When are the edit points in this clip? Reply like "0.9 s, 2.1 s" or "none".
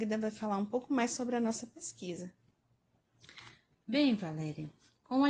3.8 s